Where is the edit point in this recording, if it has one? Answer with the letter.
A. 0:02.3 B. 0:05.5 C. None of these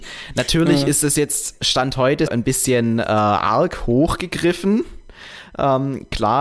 A